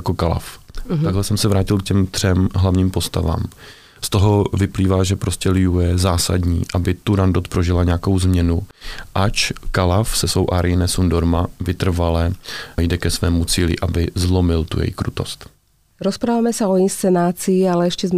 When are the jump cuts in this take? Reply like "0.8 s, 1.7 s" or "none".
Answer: none